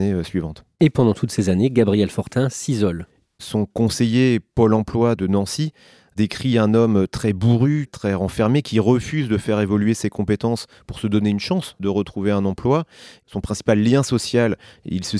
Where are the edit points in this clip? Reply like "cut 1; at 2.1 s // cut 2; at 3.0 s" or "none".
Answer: none